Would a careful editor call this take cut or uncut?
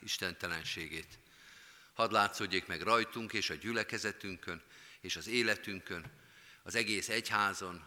uncut